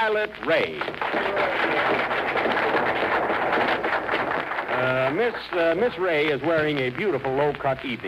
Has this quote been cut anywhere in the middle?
no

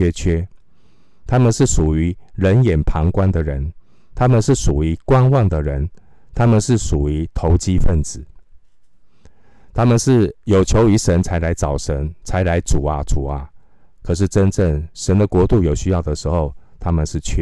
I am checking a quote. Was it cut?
no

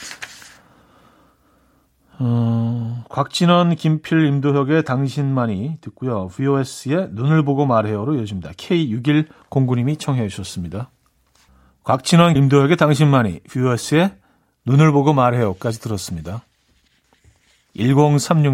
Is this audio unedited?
no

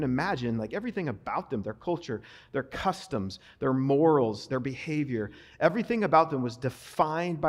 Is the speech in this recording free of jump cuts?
yes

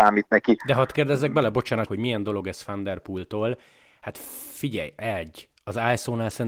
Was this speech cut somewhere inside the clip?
yes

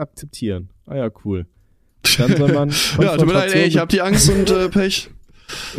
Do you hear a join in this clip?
no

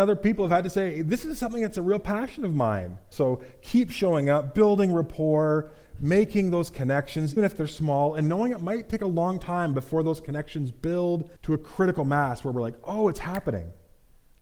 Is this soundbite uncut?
no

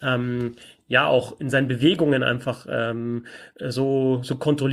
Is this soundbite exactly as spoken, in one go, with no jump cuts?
yes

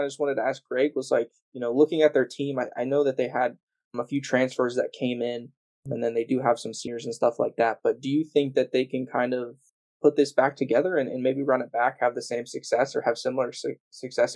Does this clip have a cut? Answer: no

